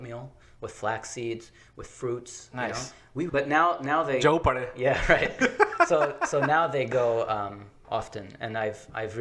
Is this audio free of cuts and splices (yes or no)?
no